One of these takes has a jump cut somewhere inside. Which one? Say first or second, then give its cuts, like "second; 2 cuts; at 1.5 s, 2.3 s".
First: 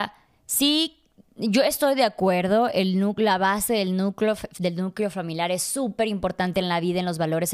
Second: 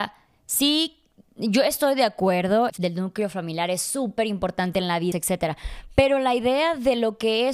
second; 2 cuts; at 2.7 s, 5.1 s